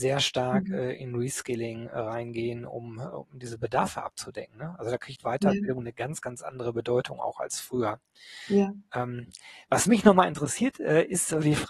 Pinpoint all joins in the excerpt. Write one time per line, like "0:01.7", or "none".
none